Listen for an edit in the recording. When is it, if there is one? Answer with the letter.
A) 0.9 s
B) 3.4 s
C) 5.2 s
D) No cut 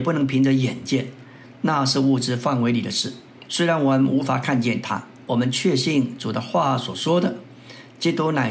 B